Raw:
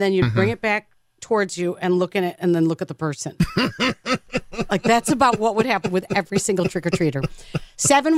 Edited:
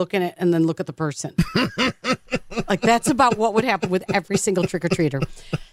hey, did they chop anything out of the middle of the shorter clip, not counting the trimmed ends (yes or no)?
no